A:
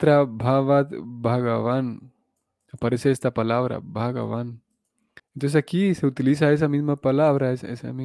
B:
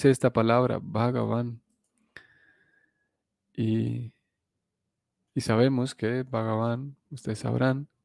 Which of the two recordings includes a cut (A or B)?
A